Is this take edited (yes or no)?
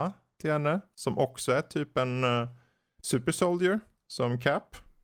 no